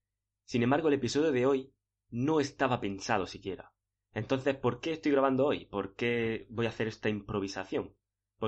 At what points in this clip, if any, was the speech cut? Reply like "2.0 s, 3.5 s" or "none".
none